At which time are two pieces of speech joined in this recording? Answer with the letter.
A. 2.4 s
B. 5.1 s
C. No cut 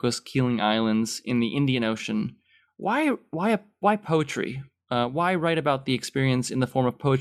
C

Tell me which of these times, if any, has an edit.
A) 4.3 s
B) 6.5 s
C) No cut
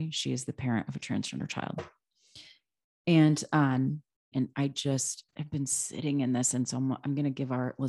A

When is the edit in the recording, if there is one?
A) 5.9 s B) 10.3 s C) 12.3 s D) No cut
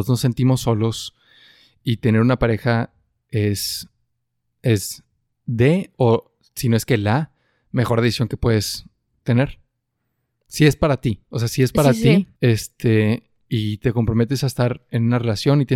C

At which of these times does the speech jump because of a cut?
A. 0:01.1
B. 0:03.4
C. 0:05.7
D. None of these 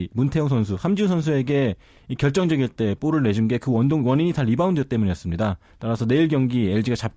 D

